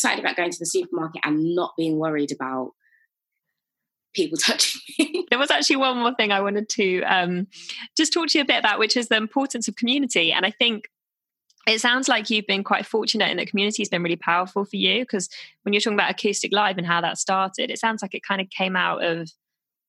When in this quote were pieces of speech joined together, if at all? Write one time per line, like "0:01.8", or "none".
0:05.3

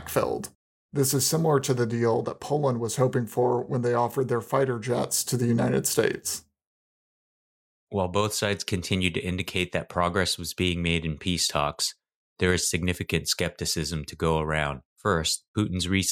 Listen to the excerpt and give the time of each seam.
0:14.9

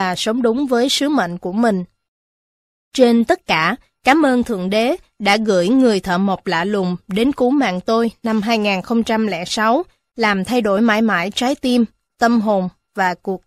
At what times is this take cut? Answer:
none

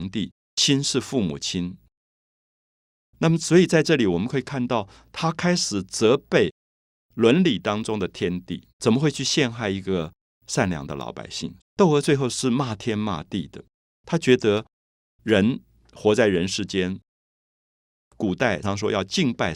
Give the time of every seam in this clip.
0:08.7
0:11.6
0:18.6

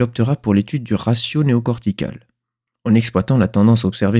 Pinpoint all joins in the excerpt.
0:02.7

